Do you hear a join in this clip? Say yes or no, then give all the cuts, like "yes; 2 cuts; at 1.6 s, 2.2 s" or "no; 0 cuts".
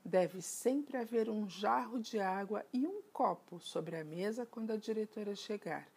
no; 0 cuts